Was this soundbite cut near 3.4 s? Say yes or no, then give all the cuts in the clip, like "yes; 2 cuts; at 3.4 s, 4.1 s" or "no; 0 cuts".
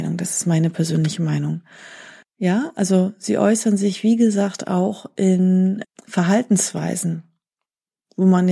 no; 2 cuts; at 2.2 s, 5.8 s